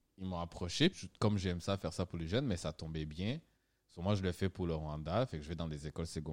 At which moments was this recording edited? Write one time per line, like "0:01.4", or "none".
0:00.9